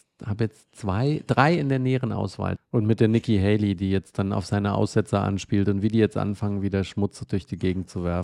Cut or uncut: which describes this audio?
cut